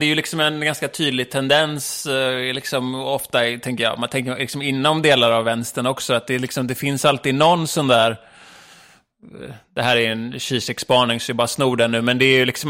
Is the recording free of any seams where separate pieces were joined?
yes; 0 cuts

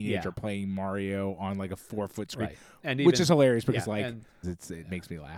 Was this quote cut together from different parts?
yes; 1 cut; at 4.4 s

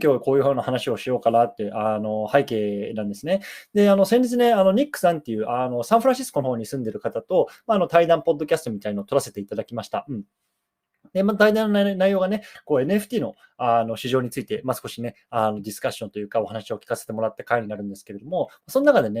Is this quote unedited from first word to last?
yes; 0 cuts

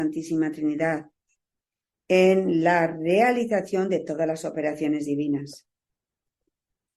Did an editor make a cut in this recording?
no; 0 cuts

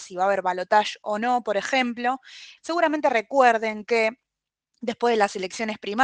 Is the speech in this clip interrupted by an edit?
yes; 1 cut; at 2.6 s

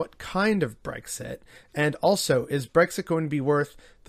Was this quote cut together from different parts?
no; 0 cuts

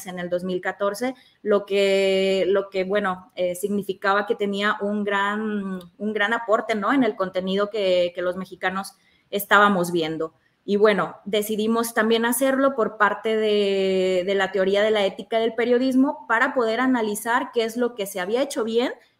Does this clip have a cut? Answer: no; 0 cuts

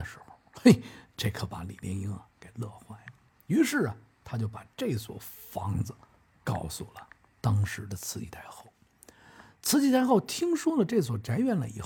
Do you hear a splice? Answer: no; 0 cuts

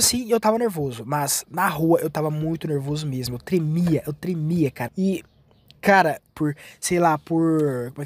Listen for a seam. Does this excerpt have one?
yes; 2 cuts; at 4.9 s, 6.3 s

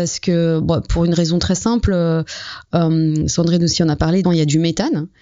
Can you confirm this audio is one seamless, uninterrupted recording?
no; 1 cut; at 4.2 s

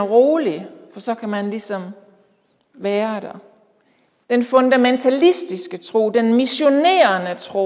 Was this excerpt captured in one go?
no; 1 cut; at 4.2 s

